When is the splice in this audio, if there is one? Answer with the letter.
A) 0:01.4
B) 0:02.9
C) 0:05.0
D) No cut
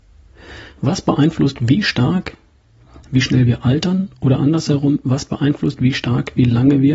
D